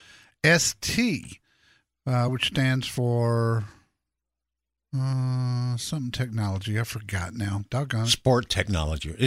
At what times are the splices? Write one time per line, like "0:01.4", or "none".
none